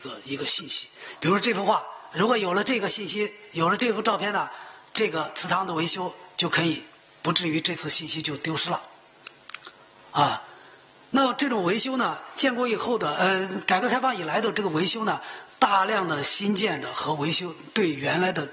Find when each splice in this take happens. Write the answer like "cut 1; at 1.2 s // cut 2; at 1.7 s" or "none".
cut 1; at 1.2 s